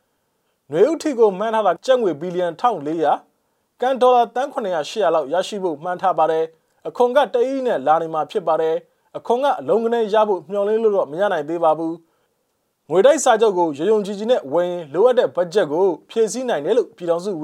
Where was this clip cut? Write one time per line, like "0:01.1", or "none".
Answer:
0:01.8